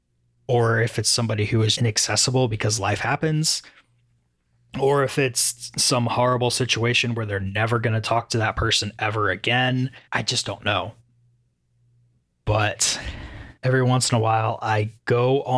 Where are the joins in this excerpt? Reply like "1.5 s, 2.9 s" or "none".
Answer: 1.7 s, 10.1 s, 13.6 s